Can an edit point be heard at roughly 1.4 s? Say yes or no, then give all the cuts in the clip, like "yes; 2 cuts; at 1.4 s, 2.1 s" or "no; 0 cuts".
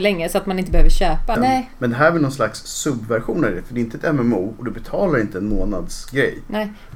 yes; 1 cut; at 1.4 s